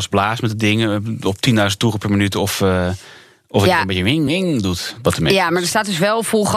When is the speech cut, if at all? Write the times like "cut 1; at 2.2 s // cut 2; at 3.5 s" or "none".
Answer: cut 1; at 4.3 s

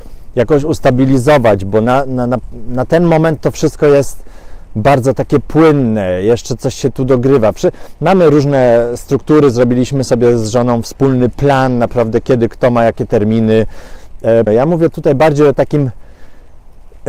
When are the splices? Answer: cut 1; at 14.5 s

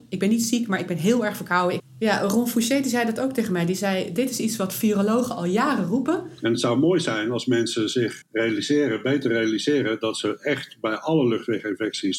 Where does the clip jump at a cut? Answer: cut 1; at 1.8 s // cut 2; at 8.2 s

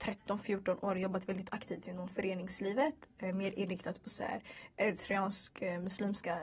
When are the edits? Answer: none

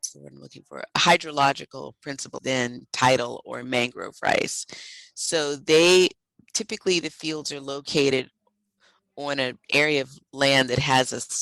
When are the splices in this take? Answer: cut 1; at 2.4 s

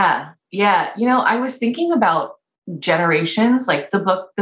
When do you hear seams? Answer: none

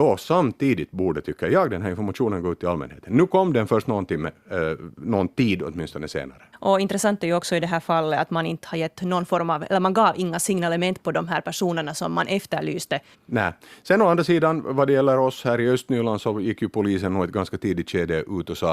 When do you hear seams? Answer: cut 1; at 6.5 s // cut 2; at 13.1 s

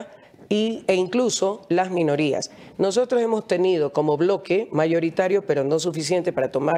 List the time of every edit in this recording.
none

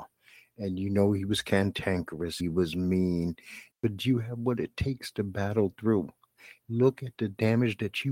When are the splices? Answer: cut 1; at 2.4 s // cut 2; at 3.7 s // cut 3; at 6.6 s

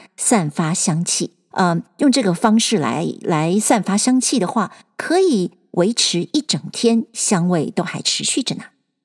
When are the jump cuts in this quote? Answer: cut 1; at 1.5 s

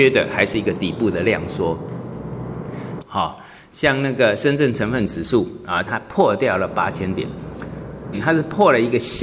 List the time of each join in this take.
cut 1; at 3.0 s // cut 2; at 5.8 s // cut 3; at 8.1 s

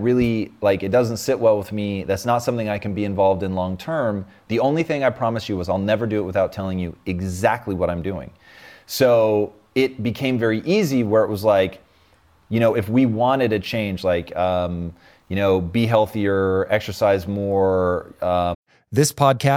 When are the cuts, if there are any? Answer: cut 1; at 4.5 s

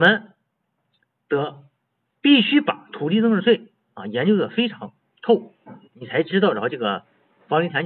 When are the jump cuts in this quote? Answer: none

